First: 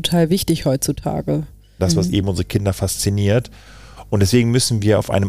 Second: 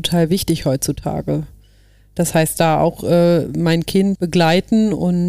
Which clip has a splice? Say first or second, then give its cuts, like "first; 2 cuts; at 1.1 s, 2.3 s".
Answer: first; 1 cut; at 1.8 s